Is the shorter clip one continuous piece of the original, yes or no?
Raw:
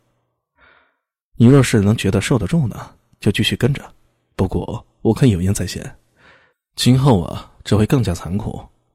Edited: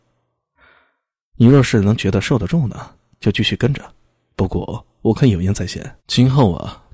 no